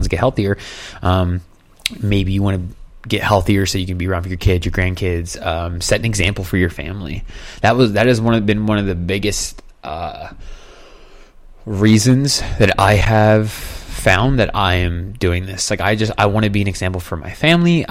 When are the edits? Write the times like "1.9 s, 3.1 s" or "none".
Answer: none